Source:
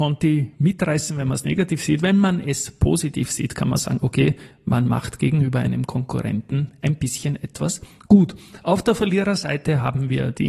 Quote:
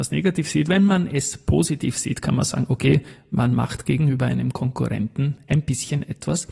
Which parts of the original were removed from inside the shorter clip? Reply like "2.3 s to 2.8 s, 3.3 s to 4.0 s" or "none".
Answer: none